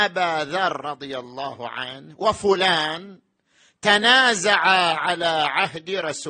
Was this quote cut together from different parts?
no; 0 cuts

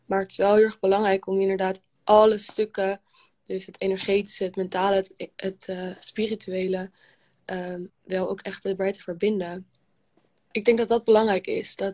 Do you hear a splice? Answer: yes; 2 cuts; at 7.9 s, 10.5 s

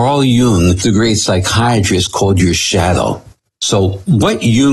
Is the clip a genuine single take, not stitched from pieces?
yes; 0 cuts

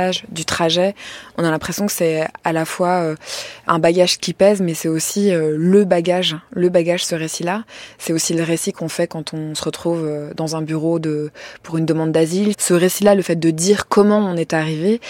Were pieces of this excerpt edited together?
yes; 1 cut; at 12.5 s

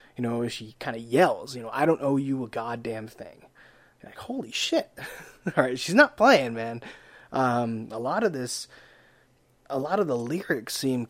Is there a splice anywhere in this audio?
no; 0 cuts

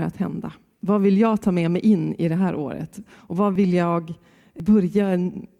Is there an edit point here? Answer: no; 0 cuts

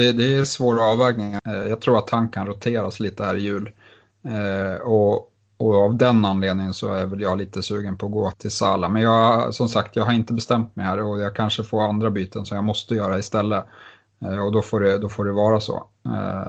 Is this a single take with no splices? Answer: no; 2 cuts; at 1.4 s, 8.3 s

